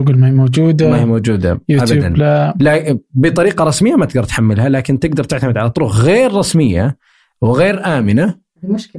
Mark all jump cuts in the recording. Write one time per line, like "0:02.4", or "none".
none